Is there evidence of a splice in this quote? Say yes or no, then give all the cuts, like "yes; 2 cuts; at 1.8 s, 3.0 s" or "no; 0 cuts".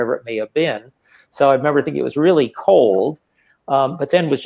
no; 0 cuts